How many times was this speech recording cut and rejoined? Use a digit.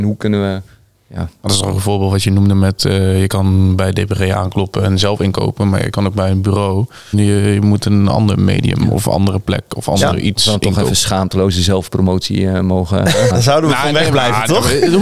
2